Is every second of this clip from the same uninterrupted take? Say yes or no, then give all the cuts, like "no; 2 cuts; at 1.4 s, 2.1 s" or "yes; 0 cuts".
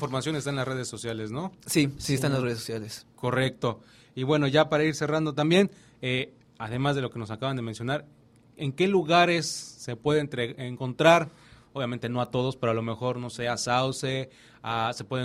yes; 0 cuts